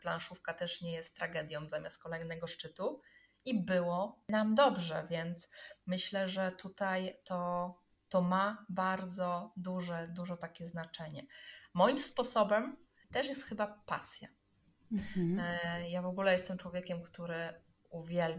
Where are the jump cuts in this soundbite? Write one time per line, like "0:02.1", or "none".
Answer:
none